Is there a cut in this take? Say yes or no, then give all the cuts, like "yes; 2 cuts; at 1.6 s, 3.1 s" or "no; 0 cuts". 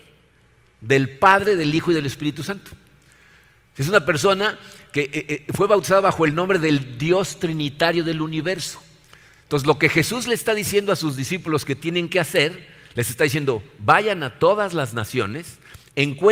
no; 0 cuts